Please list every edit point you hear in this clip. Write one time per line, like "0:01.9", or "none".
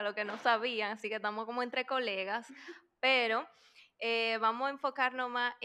none